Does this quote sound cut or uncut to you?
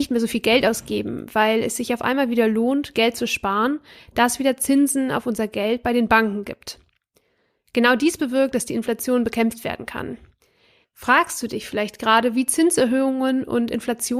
cut